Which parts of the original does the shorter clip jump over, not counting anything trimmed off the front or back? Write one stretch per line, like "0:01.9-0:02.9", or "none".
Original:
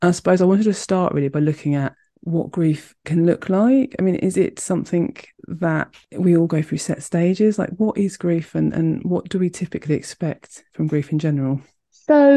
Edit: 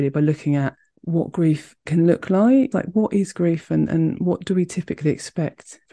0:03.9-0:07.6

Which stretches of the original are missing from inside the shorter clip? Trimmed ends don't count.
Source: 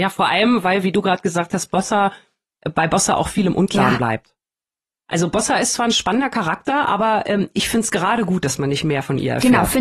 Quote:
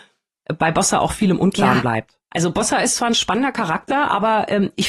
0:04.4-0:05.0

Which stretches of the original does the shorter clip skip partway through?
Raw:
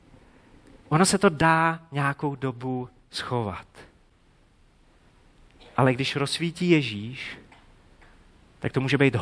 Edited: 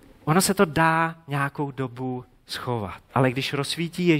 0:03.7-0:05.7

